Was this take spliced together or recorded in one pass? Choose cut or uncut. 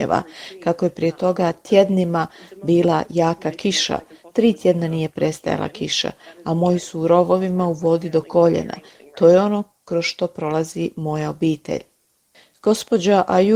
uncut